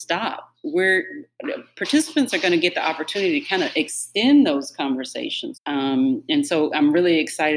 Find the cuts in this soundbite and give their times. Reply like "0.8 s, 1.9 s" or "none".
5.5 s

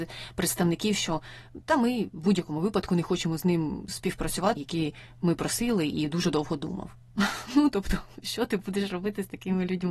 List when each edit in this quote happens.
4.6 s

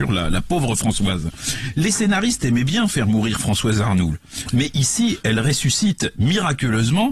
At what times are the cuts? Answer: none

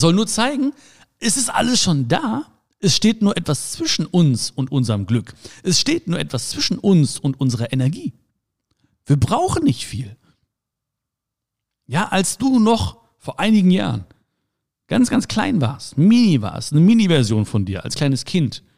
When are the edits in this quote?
none

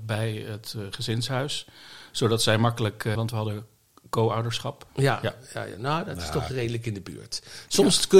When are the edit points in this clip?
3.2 s, 4.9 s

